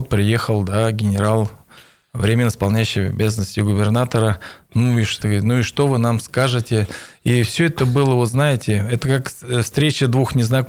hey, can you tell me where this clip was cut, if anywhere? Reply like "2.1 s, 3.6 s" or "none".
5.2 s